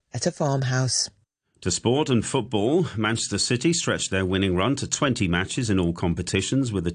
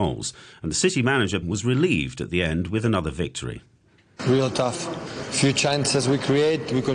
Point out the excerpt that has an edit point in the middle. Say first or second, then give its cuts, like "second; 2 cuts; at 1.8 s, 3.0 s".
second; 1 cut; at 1.4 s